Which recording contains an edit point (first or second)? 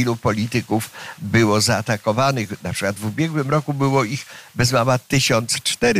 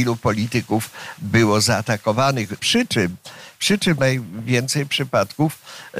second